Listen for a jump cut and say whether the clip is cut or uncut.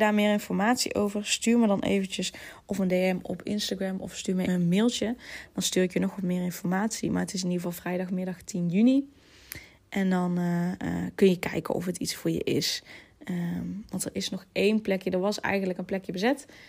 cut